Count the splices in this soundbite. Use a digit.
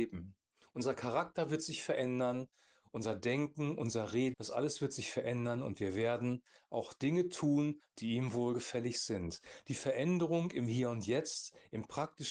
1